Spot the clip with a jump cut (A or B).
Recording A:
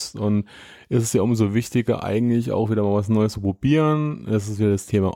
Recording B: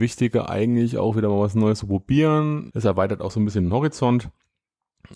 B